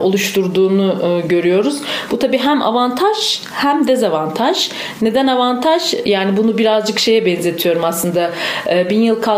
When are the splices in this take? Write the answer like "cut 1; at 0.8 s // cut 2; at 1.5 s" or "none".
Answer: none